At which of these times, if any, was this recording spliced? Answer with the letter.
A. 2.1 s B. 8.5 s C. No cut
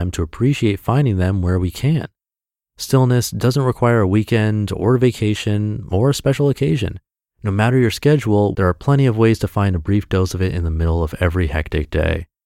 B